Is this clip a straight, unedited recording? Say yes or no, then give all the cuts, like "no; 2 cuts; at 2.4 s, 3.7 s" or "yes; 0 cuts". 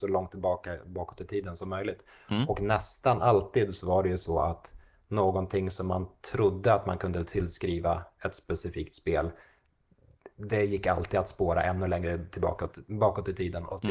yes; 0 cuts